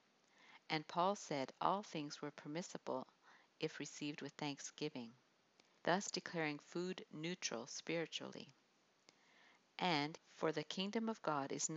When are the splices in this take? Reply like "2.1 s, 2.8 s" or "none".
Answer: 5.8 s, 10.2 s

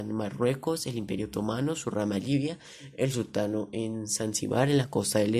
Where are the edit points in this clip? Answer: none

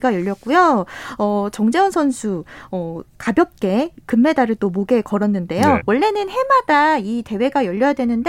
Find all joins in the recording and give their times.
5.8 s

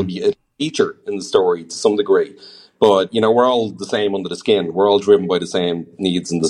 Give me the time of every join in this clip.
none

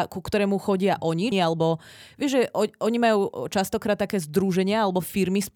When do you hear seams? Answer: 1.3 s

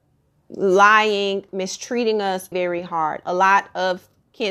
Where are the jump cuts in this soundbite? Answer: 1.5 s, 2.5 s

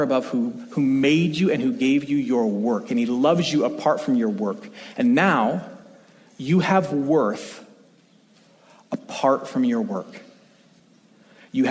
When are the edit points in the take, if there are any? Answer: none

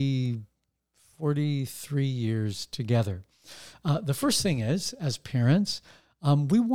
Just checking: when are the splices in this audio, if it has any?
none

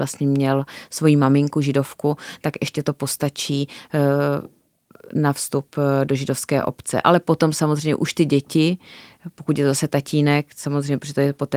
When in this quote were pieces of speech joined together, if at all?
none

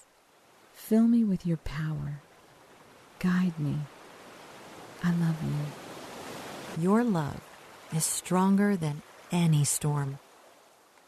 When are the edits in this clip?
6.7 s

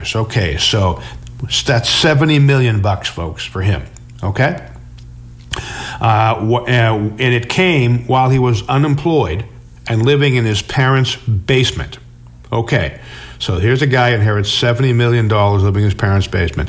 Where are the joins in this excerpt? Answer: none

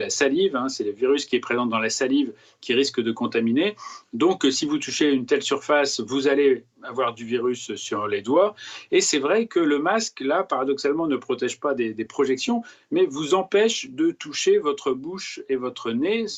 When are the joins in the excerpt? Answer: none

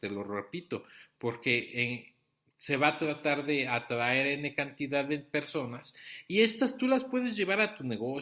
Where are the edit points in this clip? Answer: none

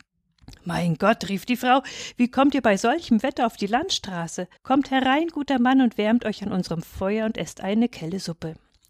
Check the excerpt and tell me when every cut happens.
4.6 s

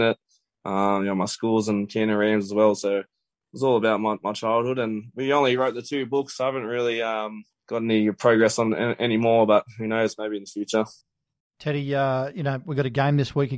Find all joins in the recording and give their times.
none

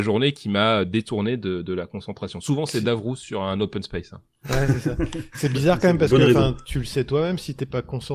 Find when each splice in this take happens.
none

